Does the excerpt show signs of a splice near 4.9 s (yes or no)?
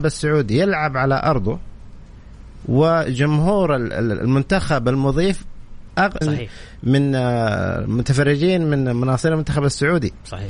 no